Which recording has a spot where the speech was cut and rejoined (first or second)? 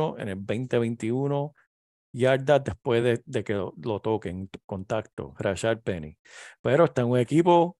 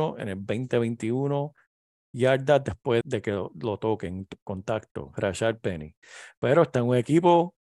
second